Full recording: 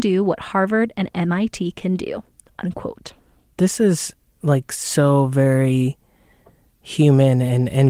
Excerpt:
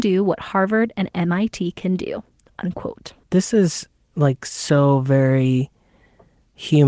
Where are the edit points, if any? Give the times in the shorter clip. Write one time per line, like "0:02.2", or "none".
0:03.2